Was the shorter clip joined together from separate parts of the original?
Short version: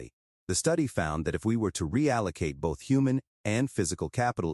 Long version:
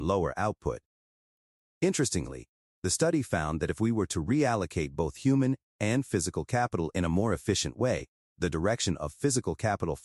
no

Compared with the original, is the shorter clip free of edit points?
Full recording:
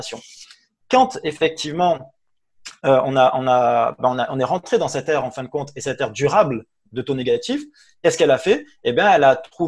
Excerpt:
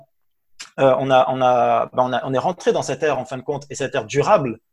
yes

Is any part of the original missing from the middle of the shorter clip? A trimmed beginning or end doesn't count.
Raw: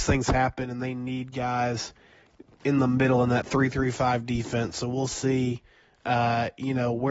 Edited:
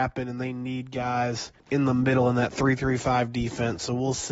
yes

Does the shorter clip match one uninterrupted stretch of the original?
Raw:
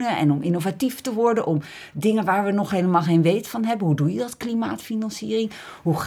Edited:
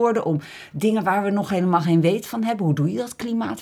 yes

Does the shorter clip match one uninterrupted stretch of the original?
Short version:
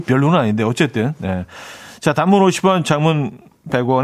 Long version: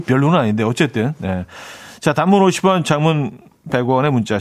yes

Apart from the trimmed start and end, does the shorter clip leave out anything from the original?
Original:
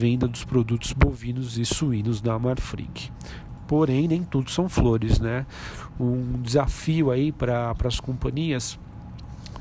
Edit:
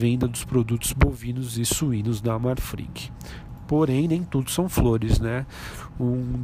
no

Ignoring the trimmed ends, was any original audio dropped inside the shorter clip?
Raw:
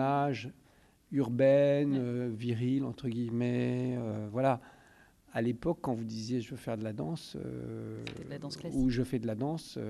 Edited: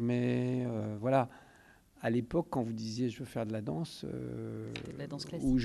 no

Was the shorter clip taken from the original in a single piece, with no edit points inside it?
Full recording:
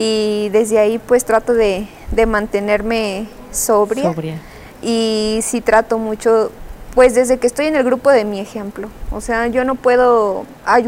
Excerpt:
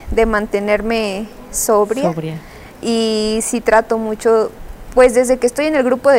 yes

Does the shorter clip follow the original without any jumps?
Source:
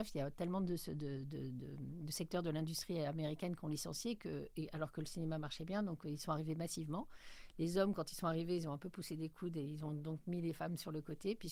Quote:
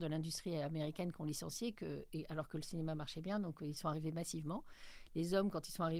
yes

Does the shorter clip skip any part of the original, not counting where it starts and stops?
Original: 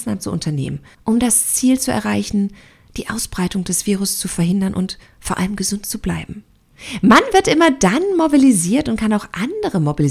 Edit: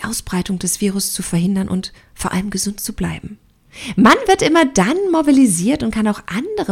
no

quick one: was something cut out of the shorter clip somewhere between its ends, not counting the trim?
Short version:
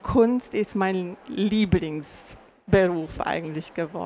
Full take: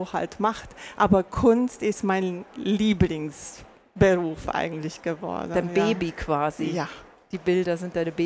no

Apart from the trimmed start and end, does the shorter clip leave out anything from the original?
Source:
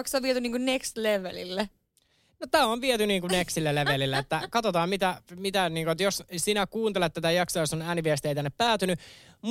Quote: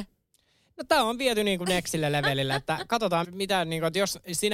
yes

